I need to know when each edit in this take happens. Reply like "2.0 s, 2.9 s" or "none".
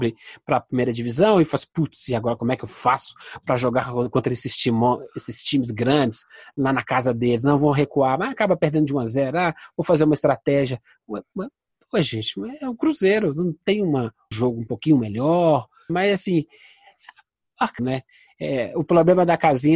14.3 s, 15.9 s, 17.8 s